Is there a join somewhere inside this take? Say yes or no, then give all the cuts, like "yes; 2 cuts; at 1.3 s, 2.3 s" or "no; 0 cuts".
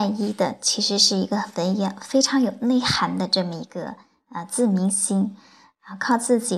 no; 0 cuts